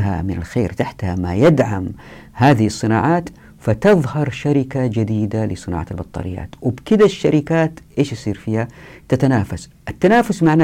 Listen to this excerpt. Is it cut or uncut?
uncut